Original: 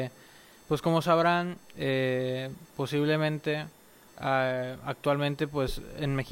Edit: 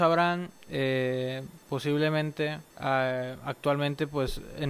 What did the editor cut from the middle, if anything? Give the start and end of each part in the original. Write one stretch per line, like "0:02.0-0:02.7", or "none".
0:03.8-0:04.1

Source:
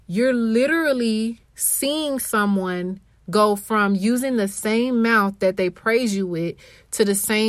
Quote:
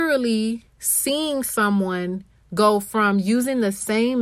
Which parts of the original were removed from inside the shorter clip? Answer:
none

